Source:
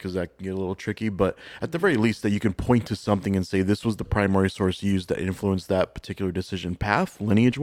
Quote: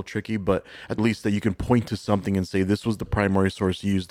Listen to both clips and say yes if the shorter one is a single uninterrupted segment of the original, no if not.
no